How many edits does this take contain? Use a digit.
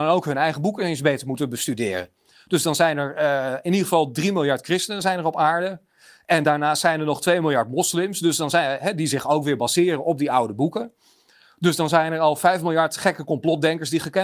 0